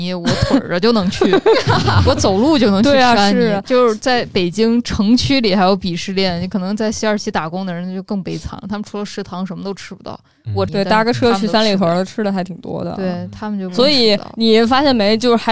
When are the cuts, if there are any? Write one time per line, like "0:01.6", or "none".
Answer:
0:10.7